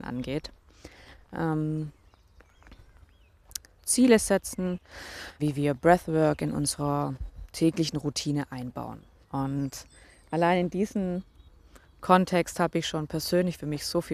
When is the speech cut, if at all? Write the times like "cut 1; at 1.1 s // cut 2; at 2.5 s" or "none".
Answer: cut 1; at 3.8 s // cut 2; at 5.4 s // cut 3; at 9.2 s